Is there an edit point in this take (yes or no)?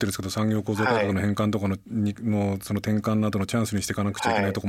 no